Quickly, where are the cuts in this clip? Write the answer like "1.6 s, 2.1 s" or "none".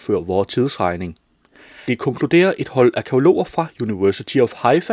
none